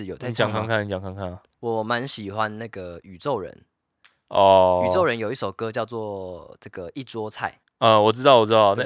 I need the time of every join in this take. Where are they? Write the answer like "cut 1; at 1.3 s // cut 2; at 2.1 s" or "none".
none